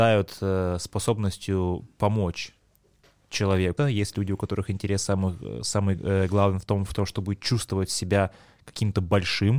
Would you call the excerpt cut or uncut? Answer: cut